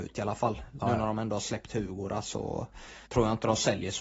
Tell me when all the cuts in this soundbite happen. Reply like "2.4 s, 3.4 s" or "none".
3.1 s